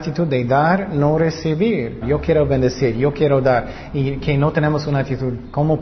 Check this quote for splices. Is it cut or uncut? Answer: cut